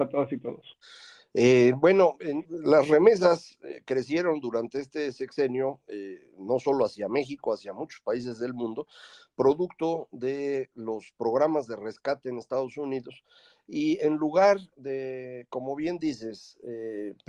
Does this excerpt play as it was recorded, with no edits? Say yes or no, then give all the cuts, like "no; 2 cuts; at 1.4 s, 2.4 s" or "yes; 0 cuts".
no; 1 cut; at 2.4 s